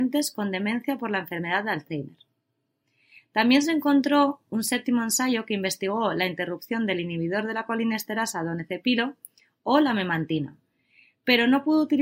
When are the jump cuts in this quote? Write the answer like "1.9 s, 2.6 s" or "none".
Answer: none